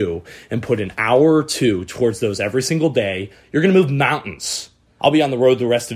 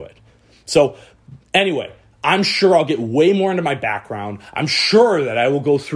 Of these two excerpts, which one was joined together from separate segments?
first; 1 cut; at 5.0 s

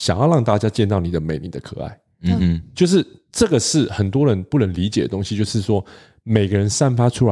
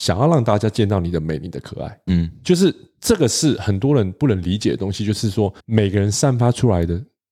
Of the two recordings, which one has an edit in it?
second; 2 cuts; at 2.1 s, 5.6 s

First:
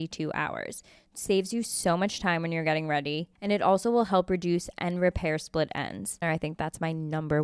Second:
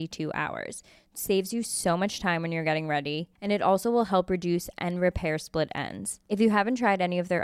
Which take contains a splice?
first; 1 cut; at 6.2 s

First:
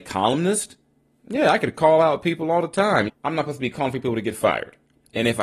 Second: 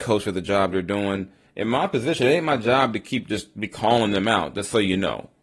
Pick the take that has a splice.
first; 1 cut; at 3.1 s

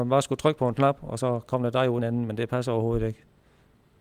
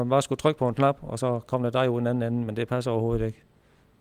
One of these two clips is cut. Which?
first; 1 cut; at 2.0 s

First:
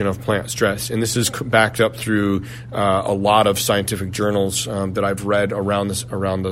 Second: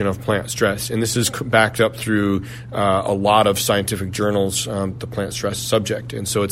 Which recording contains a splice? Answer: second; 1 cut; at 4.9 s

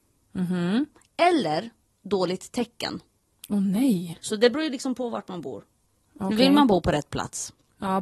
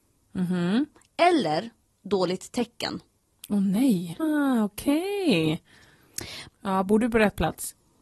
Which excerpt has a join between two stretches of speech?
second; 2 cuts; at 4.2 s, 6.5 s

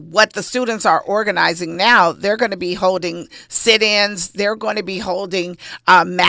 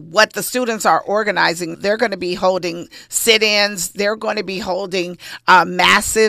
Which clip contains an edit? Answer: second; 1 cut; at 1.7 s

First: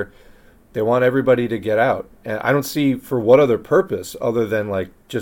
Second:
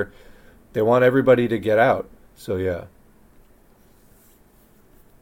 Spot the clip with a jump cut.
second; 1 cut; at 2.2 s

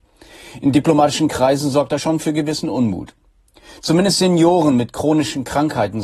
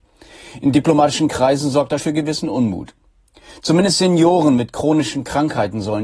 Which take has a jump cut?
second; 1 cut; at 2.0 s

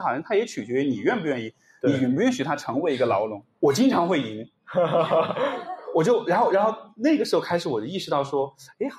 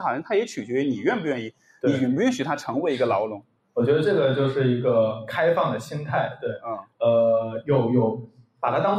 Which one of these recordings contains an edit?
first; 1 cut; at 3.5 s

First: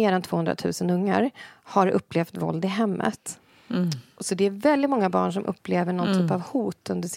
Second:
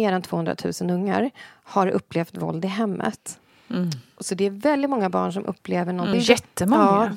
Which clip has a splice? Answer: second; 1 cut; at 6.1 s

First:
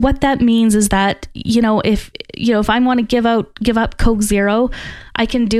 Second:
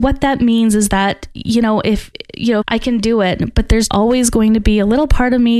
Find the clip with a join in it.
second; 2 cuts; at 2.6 s, 3.9 s

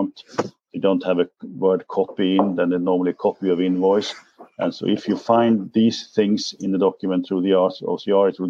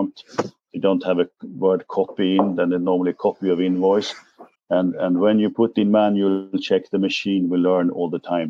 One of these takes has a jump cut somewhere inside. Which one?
second; 1 cut; at 4.5 s

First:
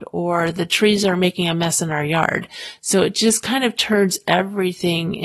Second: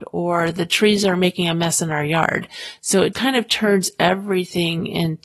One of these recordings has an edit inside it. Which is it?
second; 1 cut; at 3.1 s

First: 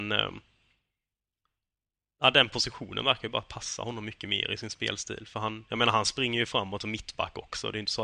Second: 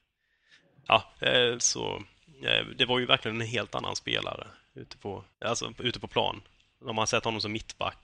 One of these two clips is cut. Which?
second; 2 cuts; at 1.6 s, 5.3 s

